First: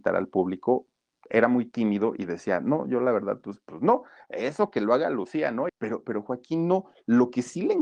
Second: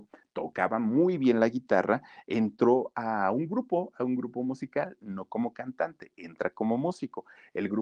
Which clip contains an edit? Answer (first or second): first